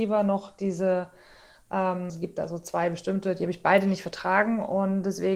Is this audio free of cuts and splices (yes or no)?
no